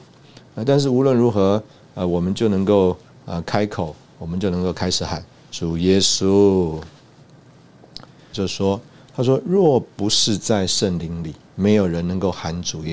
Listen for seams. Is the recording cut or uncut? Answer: cut